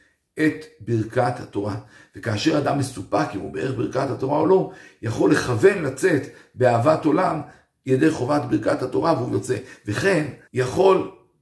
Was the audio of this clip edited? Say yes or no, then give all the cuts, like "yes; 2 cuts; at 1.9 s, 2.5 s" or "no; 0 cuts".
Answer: yes; 1 cut; at 10.5 s